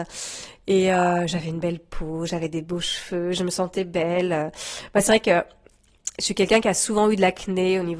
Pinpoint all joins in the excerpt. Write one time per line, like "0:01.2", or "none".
none